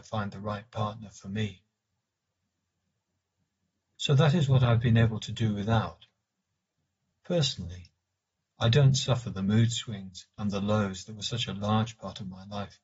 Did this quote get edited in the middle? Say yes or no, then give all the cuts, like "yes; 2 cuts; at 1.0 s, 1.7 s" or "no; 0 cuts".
yes; 1 cut; at 7.1 s